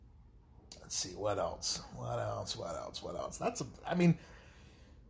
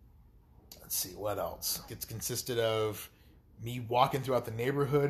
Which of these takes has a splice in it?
second; 1 cut; at 1.9 s

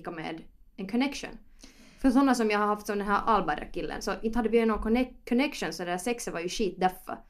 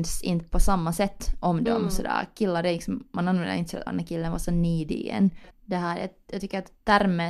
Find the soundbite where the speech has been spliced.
second; 2 cuts; at 3.9 s, 5.5 s

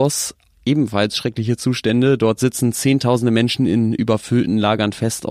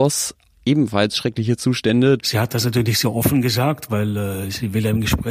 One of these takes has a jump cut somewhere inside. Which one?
second; 1 cut; at 2.2 s

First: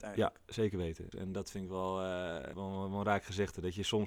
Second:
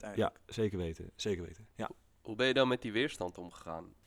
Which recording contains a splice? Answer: first; 2 cuts; at 1.1 s, 2.5 s

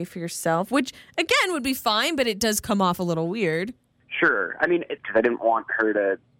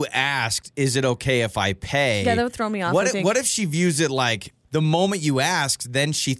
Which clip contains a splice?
first; 1 cut; at 5.0 s

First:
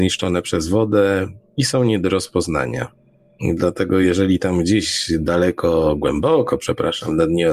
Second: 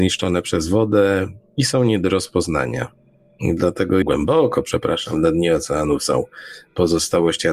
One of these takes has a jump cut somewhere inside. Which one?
second; 1 cut; at 4.0 s

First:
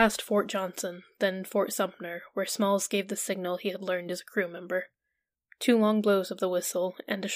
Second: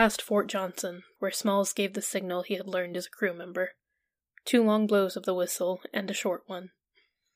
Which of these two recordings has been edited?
second; 1 cut; at 1.2 s

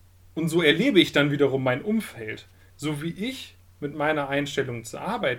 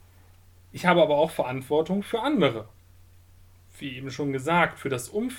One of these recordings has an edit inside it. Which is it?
first; 1 cut; at 2.7 s

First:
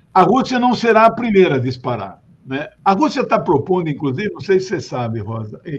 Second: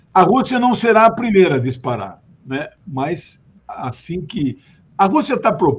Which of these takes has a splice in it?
first; 1 cut; at 2.8 s

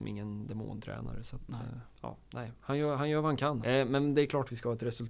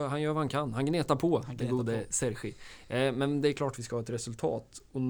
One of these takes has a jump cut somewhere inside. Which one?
first; 2 cuts; at 1.9 s, 3.6 s

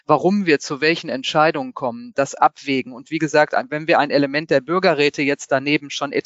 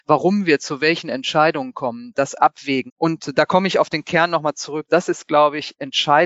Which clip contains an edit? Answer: second; 2 cuts; at 2.9 s, 4.9 s

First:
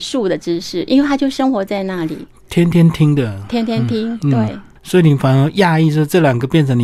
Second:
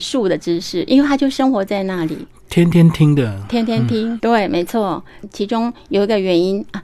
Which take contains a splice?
second; 2 cuts; at 4.2 s, 5.2 s

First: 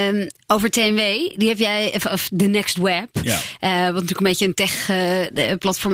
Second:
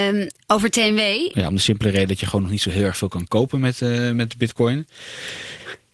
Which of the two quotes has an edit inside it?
second; 1 cut; at 1.3 s

